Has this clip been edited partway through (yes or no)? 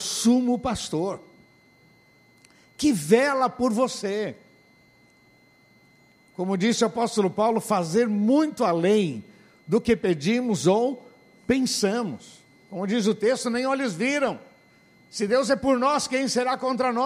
yes